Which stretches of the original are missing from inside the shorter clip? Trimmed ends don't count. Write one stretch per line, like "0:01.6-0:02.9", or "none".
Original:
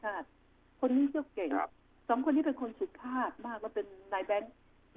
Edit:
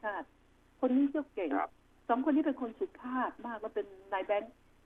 none